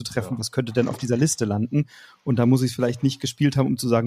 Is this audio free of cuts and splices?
yes; 0 cuts

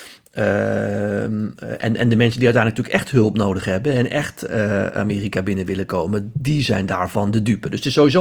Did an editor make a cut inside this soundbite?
no; 0 cuts

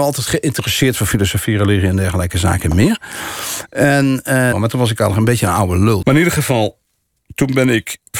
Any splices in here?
yes; 2 cuts; at 4.5 s, 6.0 s

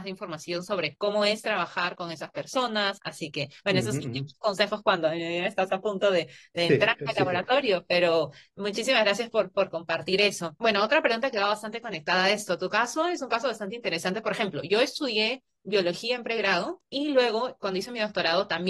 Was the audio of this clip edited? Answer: no; 0 cuts

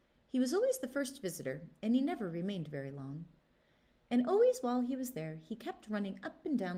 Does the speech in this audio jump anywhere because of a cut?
no; 0 cuts

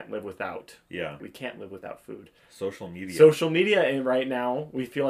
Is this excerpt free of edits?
no; 1 cut; at 1.2 s

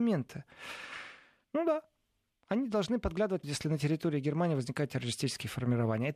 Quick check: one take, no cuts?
no; 2 cuts; at 1.4 s, 3.4 s

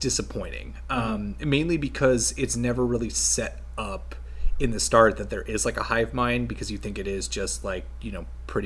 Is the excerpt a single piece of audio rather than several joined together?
yes; 0 cuts

